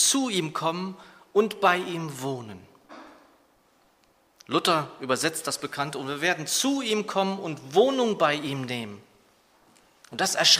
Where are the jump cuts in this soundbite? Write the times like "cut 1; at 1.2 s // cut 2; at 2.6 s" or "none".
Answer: none